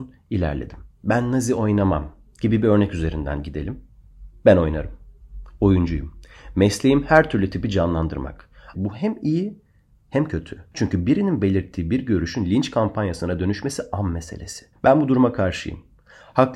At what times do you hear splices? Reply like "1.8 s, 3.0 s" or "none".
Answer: 0.9 s, 8.7 s